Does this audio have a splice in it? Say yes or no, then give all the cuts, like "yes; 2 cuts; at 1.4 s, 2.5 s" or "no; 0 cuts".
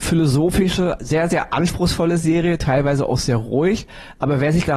no; 0 cuts